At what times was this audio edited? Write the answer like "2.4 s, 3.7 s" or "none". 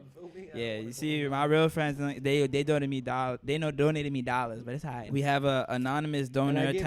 5.1 s